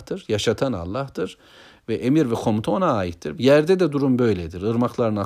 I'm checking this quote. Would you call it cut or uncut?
cut